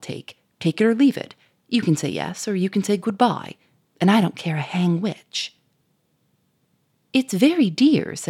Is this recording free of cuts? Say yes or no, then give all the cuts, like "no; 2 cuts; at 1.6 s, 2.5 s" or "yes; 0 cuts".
yes; 0 cuts